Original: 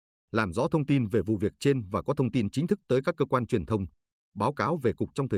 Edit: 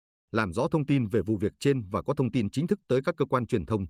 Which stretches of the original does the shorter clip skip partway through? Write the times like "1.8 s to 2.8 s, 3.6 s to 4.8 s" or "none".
none